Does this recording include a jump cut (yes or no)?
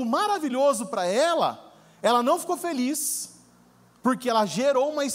no